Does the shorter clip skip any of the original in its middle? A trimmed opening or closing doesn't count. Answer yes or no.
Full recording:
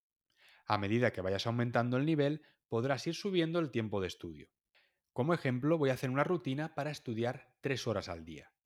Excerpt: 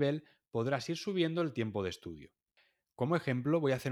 no